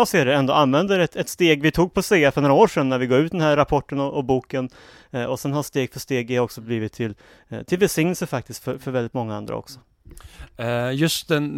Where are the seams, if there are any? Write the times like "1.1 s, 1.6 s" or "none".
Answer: none